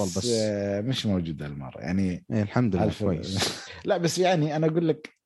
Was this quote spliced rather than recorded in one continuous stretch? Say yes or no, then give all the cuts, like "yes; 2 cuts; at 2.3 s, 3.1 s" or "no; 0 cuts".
yes; 1 cut; at 3.7 s